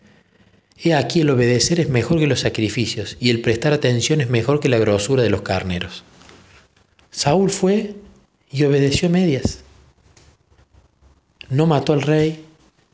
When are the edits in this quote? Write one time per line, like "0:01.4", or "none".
0:07.0